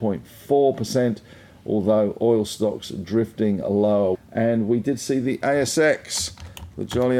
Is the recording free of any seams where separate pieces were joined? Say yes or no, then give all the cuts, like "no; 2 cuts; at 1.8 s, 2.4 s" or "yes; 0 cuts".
no; 1 cut; at 4.1 s